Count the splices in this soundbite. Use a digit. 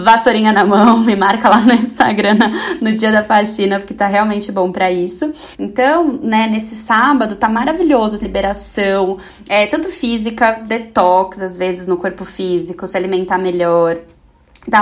2